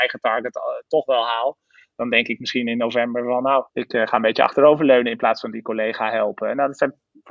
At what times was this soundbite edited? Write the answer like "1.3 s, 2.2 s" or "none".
3.7 s